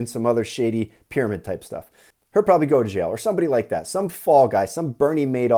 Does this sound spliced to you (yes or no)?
yes